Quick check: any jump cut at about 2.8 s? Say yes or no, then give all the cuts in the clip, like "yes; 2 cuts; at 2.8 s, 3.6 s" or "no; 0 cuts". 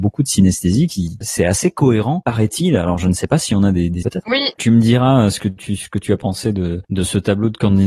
no; 1 cut; at 4.0 s